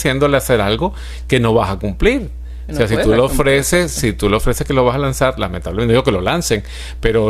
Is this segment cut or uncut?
uncut